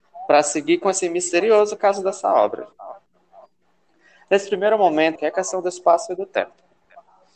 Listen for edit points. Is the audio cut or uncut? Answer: cut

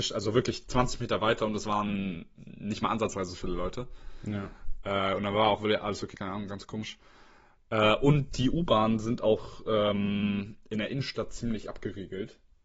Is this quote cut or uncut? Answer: cut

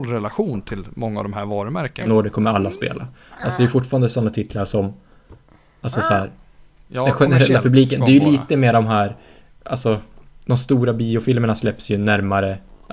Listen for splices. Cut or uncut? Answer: cut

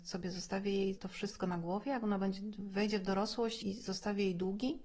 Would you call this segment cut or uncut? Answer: cut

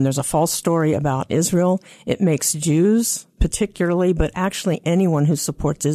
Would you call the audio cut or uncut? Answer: uncut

